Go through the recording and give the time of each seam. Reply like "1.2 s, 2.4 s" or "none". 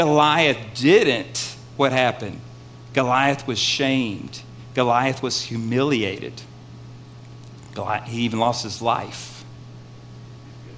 none